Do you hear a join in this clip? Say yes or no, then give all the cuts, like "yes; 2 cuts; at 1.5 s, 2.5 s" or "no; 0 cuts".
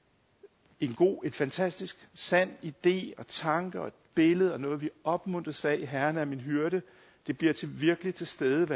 no; 0 cuts